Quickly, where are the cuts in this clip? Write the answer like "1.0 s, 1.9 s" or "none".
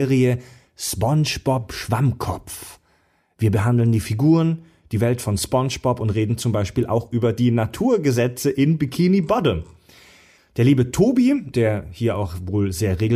10.4 s, 11.5 s

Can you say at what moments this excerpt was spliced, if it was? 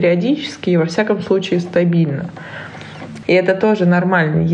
3.2 s

